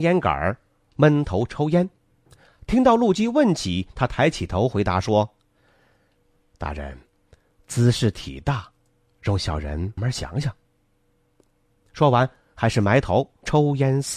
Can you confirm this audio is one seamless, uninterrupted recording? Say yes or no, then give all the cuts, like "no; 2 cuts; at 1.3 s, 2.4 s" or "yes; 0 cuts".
no; 1 cut; at 10.0 s